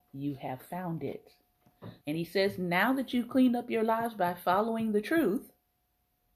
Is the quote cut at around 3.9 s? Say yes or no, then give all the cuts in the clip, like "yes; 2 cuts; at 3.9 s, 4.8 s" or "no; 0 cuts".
no; 1 cut; at 2.0 s